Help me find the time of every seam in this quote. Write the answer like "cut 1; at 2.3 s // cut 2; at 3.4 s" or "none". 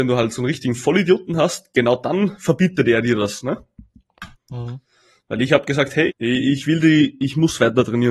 cut 1; at 4.3 s // cut 2; at 6.1 s